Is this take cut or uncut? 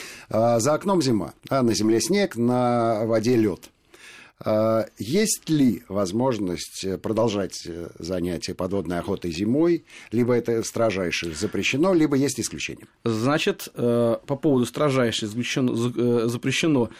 cut